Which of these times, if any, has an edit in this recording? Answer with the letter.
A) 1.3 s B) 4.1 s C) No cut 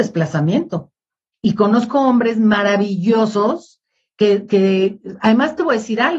A